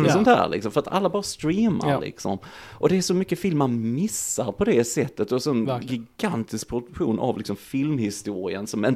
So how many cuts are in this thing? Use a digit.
0